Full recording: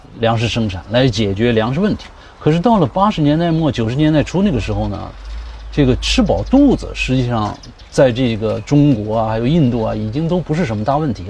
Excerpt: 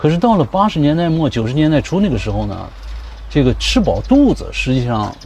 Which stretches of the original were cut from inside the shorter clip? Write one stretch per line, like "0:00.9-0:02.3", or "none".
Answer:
none

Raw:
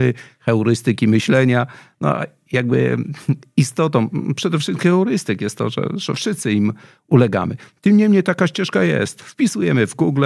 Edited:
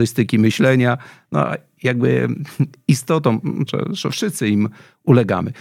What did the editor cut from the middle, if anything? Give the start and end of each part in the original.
0:04.4-0:05.7

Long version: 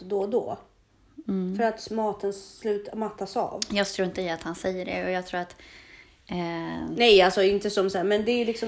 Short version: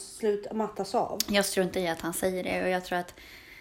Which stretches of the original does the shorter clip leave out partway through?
none

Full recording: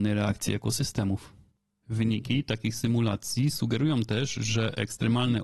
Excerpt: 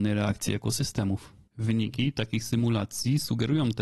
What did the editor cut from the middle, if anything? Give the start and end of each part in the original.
0:01.5-0:01.8

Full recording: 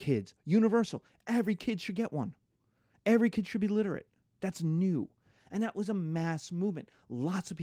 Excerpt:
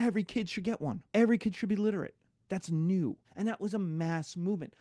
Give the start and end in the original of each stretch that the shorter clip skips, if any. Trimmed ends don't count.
0:02.4-0:03.0
0:05.2-0:05.4

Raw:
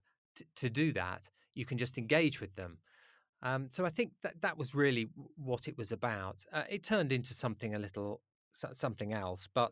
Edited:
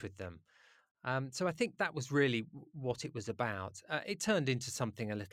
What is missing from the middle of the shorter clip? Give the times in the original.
0:04.2-0:04.4

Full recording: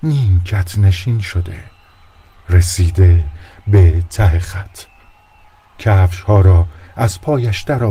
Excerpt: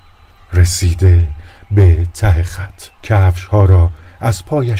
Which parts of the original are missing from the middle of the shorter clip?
0:04.9-0:05.7

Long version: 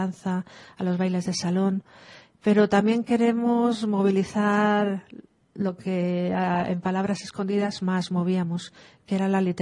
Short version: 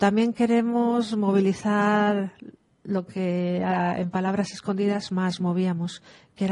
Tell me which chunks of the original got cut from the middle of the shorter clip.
none

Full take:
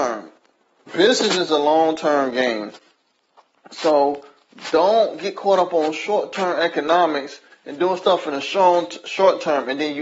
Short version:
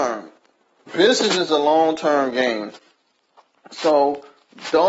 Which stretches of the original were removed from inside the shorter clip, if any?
none

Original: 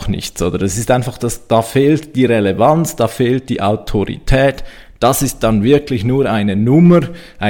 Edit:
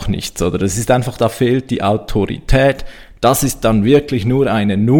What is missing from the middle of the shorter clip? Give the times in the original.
0:01.2-0:03.0

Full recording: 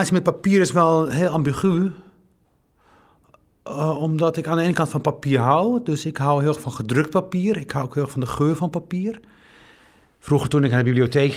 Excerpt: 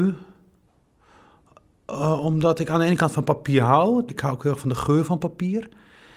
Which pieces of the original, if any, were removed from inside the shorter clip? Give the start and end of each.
0:05.9-0:07.6

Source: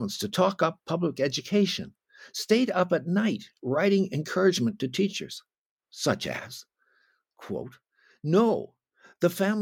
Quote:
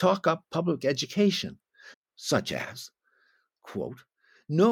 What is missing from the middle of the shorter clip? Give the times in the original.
0:02.3-0:05.7

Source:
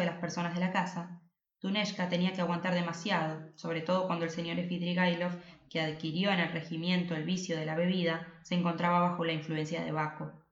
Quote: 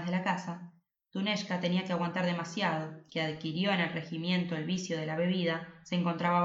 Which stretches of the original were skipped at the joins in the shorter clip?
0:03.6-0:05.7

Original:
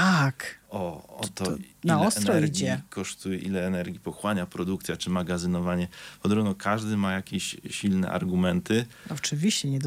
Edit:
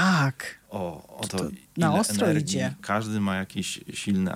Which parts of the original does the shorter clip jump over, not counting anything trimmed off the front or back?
0:01.3-0:01.4
0:02.9-0:06.6

